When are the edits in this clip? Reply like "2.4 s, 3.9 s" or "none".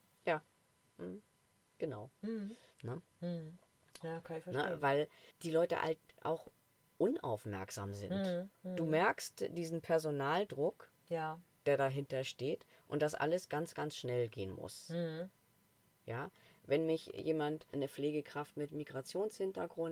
2.7 s, 4.0 s